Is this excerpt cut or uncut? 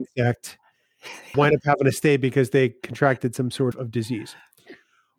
cut